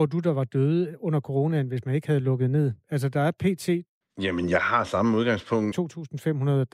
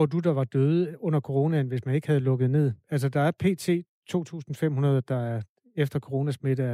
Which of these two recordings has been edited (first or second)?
first